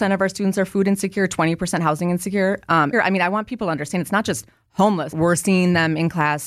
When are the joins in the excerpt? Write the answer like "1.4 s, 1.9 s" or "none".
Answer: 2.9 s, 5.1 s

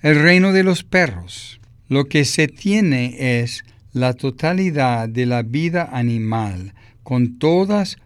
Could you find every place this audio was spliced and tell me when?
1.8 s

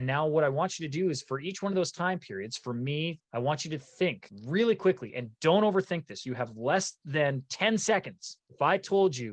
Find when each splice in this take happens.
3.2 s

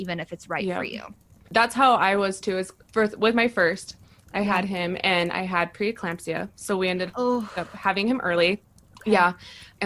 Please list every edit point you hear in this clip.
none

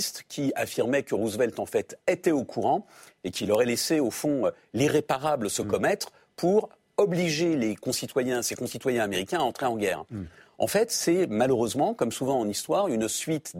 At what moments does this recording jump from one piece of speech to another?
none

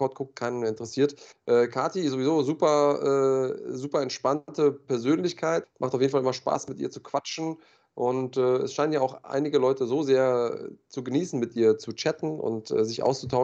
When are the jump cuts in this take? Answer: 1.3 s, 5.6 s

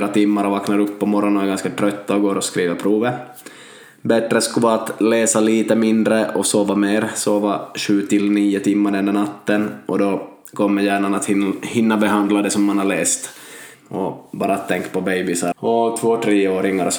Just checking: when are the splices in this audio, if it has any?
13.7 s, 15.5 s

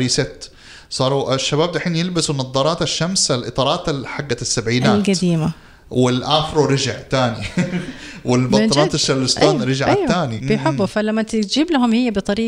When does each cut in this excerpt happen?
10.4 s

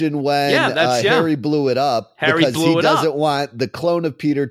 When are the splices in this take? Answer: none

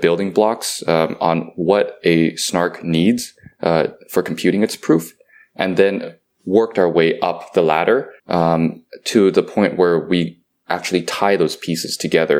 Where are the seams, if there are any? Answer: 8.2 s

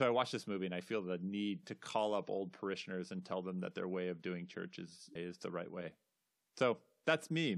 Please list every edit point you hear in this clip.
5.2 s

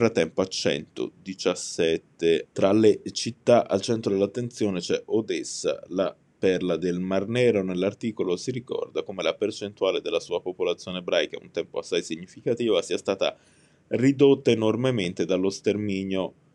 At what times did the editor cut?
2.5 s

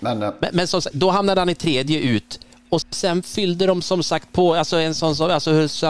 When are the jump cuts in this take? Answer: 2.8 s

